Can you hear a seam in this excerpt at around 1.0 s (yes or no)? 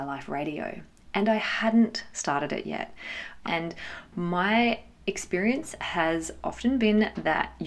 no